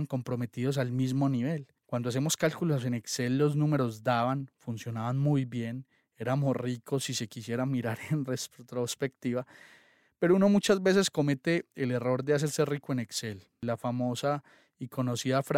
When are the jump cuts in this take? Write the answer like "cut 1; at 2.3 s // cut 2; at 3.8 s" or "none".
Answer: cut 1; at 1.8 s